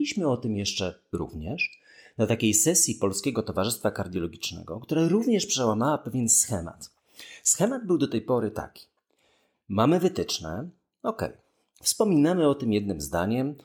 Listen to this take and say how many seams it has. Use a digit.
0